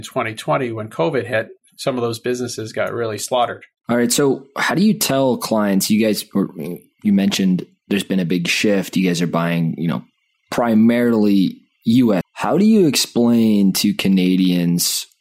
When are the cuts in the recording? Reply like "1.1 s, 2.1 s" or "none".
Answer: 12.2 s